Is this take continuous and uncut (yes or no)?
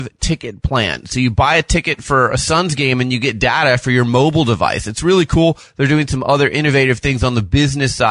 yes